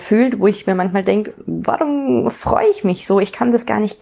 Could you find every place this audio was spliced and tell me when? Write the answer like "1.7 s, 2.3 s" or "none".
none